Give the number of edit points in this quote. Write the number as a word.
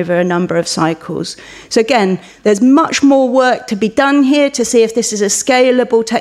zero